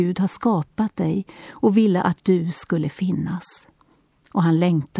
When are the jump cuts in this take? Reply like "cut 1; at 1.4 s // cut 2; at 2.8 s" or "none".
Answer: cut 1; at 2.2 s